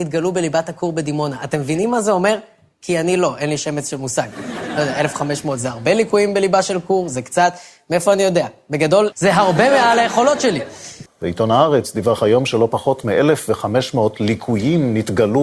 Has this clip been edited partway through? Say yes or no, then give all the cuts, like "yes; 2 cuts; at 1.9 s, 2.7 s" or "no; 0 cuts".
yes; 2 cuts; at 9.1 s, 11.1 s